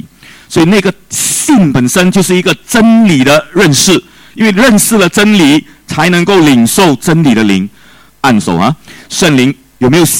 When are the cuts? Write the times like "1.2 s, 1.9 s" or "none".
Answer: 8.1 s